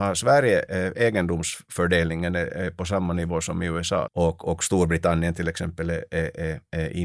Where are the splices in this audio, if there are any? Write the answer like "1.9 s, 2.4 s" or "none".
4.0 s